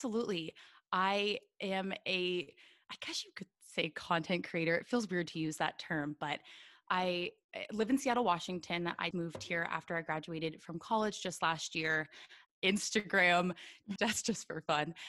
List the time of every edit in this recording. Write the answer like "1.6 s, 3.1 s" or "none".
9.1 s, 12.5 s, 14.0 s